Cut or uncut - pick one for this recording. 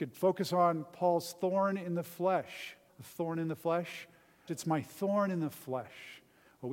cut